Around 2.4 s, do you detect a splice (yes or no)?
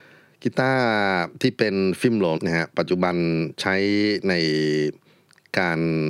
yes